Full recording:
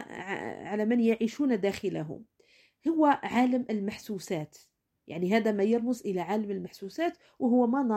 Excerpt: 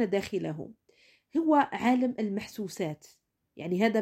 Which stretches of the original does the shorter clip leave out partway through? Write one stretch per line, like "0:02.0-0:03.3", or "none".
none